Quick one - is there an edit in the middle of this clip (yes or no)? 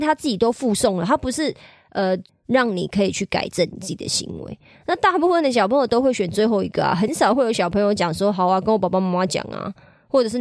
yes